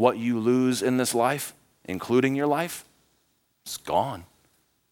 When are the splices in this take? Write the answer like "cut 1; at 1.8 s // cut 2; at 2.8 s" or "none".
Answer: none